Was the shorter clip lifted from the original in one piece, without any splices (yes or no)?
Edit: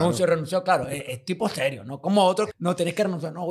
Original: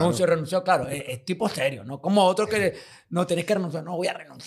no